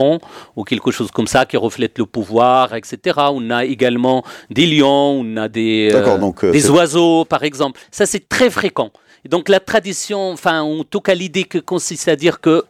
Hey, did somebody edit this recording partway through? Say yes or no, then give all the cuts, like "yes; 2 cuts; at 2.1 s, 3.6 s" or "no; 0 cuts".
yes; 1 cut; at 2.7 s